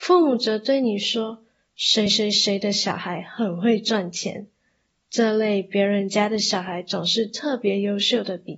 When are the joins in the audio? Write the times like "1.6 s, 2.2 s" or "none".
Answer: none